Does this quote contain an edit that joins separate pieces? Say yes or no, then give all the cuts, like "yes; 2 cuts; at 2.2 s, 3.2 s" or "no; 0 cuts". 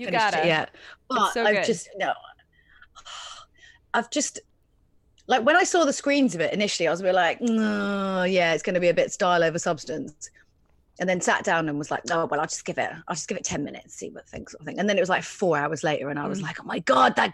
no; 0 cuts